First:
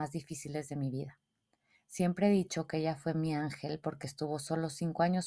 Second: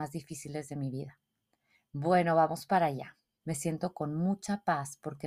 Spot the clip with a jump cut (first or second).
second